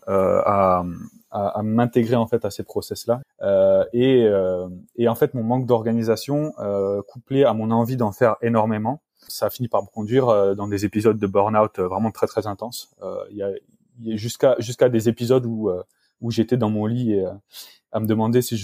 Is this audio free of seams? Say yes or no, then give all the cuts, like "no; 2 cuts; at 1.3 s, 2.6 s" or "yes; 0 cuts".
no; 2 cuts; at 3.2 s, 9.3 s